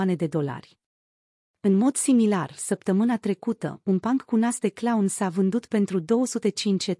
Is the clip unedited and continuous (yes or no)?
yes